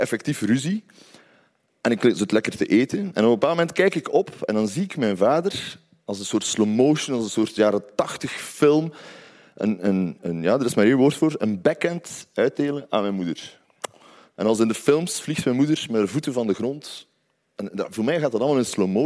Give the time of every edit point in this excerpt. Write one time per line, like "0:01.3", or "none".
none